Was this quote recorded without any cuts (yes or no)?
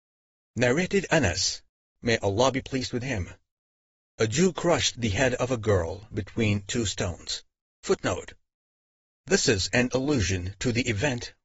no